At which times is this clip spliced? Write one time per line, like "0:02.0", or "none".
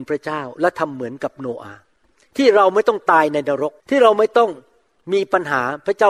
0:03.8